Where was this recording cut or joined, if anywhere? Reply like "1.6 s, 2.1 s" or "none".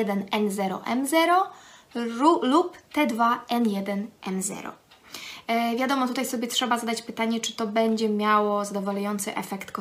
none